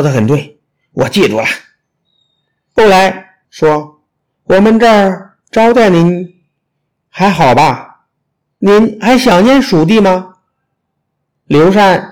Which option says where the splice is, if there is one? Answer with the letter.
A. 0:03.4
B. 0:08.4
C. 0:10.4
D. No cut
A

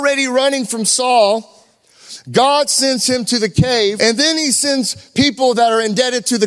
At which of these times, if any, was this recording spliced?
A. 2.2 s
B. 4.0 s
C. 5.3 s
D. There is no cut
B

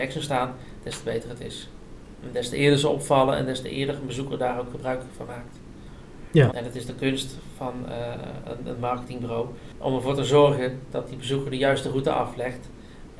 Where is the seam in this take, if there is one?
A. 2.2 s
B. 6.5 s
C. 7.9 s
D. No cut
B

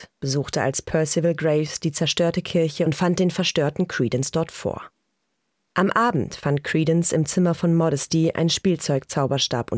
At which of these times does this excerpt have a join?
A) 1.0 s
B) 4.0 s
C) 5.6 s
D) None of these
C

